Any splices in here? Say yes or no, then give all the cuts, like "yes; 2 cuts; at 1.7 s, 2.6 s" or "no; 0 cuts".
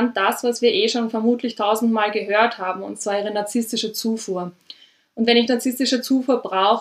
no; 0 cuts